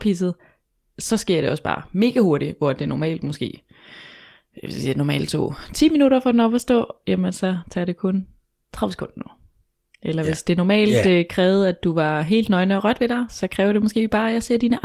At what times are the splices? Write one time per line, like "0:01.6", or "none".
none